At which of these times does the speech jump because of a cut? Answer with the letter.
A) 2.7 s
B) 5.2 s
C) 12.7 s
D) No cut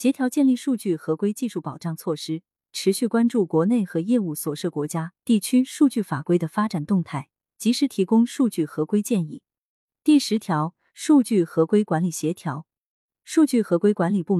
A